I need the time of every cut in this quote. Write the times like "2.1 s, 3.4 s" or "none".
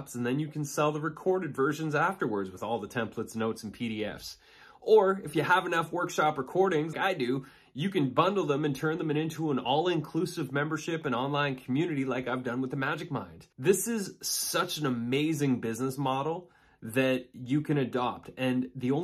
6.9 s, 13.5 s